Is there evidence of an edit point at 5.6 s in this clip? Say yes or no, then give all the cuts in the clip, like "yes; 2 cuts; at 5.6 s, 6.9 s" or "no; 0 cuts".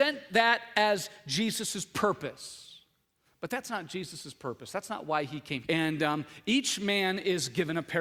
yes; 1 cut; at 5.6 s